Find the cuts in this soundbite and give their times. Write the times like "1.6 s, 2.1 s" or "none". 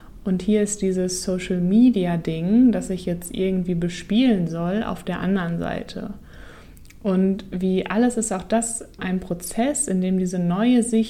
9.0 s